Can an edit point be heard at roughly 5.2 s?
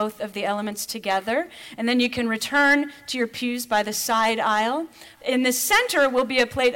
yes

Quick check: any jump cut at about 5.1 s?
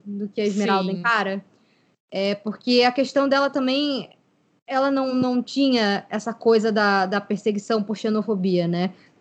no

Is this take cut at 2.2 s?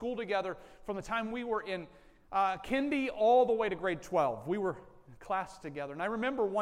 no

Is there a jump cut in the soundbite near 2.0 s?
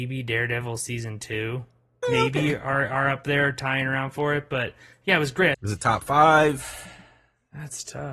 yes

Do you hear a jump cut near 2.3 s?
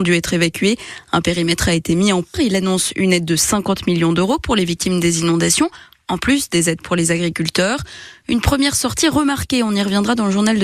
yes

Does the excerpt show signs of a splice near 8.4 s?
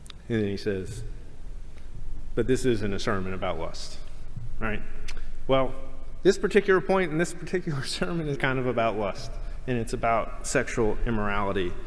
yes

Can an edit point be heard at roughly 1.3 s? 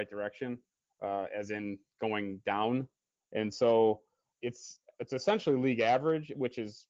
no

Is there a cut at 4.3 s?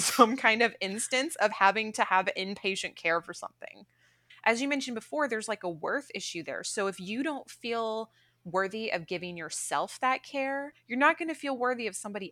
yes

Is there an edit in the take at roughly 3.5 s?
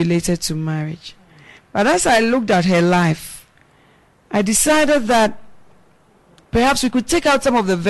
no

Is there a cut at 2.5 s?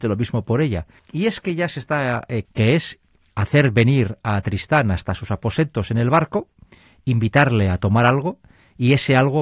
yes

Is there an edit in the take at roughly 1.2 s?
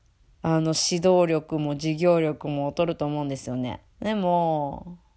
no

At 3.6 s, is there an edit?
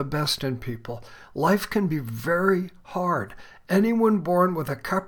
no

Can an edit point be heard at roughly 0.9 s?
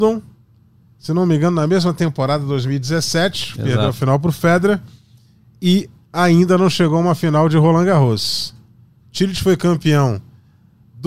no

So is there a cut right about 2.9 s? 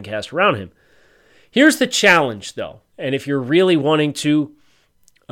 yes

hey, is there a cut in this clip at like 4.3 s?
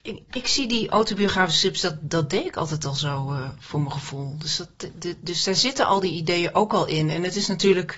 no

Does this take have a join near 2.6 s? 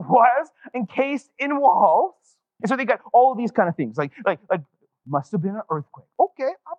yes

